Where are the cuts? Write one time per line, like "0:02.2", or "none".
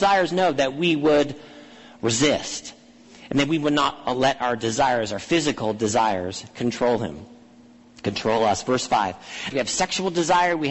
0:09.5